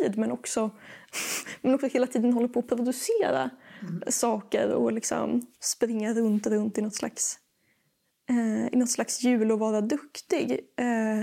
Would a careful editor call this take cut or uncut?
cut